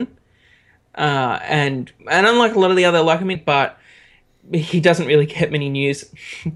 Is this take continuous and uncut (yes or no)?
no